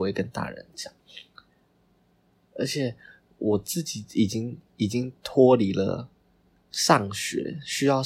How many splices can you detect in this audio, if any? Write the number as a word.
zero